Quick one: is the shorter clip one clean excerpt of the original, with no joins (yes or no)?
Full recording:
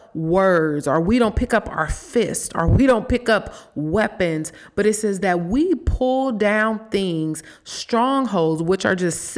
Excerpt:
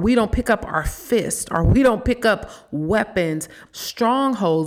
no